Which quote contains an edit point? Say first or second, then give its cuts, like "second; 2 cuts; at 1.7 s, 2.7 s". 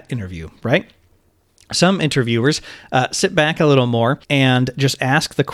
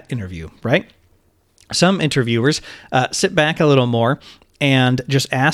first; 1 cut; at 4.2 s